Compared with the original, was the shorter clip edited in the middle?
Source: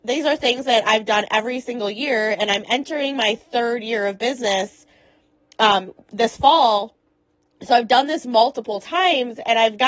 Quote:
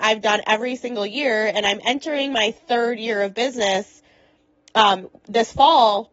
no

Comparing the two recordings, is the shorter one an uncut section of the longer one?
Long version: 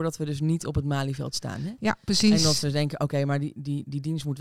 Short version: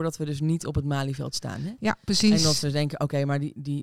yes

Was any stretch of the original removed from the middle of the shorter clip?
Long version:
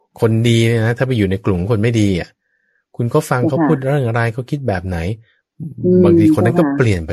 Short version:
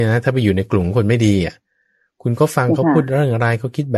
no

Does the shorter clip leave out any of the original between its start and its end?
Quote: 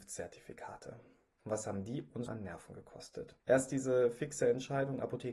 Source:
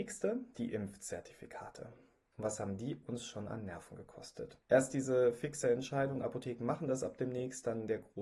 yes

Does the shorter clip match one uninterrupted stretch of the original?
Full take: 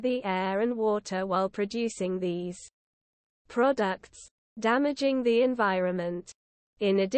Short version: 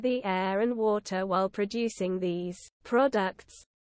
no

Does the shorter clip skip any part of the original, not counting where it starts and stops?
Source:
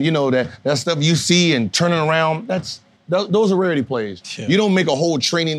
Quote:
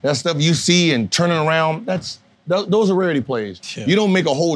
no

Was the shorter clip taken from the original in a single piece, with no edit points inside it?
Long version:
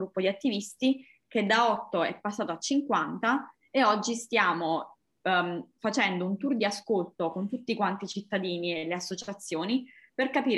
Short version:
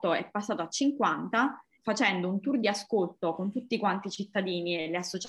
no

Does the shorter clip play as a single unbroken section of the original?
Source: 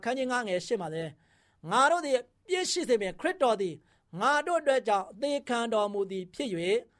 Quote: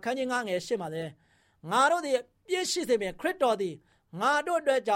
yes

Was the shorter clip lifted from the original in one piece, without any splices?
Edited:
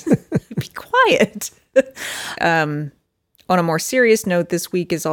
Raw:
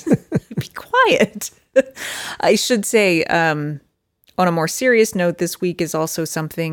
no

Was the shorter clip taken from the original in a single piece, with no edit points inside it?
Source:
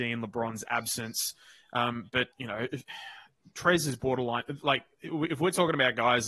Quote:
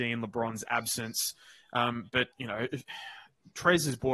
yes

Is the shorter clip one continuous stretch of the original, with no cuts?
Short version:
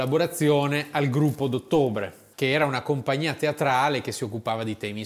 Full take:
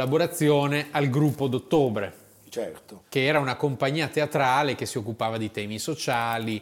no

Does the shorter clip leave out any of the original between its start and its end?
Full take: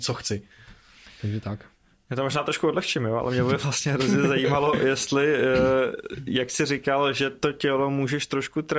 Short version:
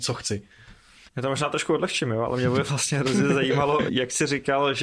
yes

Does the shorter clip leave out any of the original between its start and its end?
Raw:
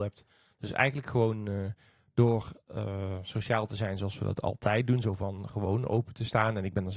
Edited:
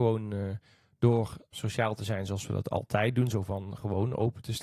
yes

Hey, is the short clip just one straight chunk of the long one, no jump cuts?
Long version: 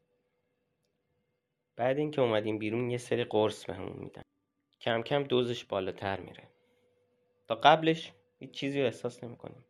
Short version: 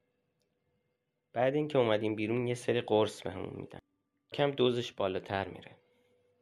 no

